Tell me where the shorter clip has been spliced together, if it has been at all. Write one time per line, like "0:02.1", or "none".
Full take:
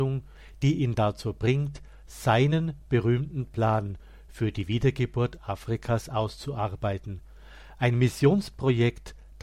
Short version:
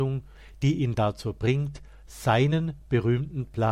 none